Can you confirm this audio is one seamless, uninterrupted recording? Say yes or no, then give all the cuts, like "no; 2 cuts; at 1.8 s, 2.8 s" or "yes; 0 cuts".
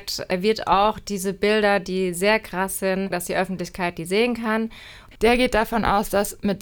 no; 2 cuts; at 3.1 s, 5.1 s